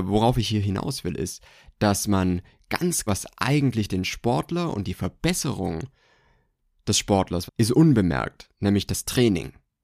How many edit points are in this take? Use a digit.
2